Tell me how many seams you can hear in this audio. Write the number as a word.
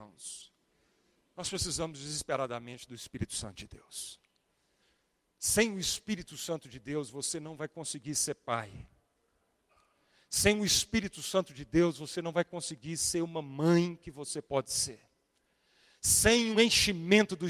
one